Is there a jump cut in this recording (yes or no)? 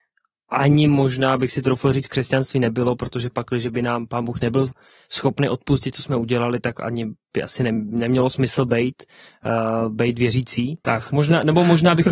yes